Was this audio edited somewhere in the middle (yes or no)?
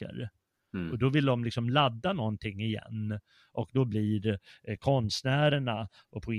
no